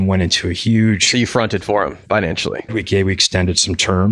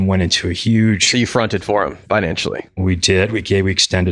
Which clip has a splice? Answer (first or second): first